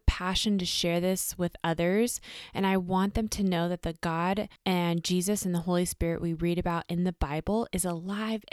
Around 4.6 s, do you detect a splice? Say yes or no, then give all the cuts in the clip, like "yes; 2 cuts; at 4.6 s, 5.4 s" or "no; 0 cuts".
yes; 1 cut; at 4.6 s